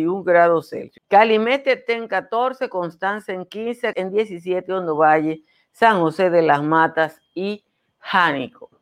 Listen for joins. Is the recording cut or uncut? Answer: cut